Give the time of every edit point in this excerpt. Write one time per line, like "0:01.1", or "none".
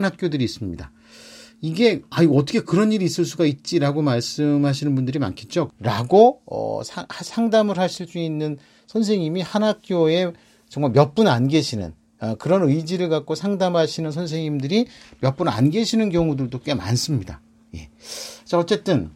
0:05.7